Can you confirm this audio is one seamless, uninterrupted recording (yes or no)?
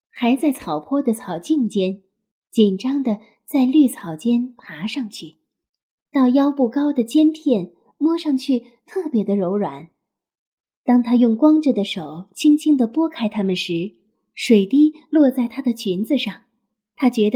no